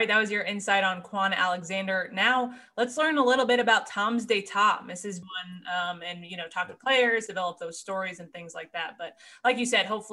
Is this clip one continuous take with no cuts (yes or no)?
no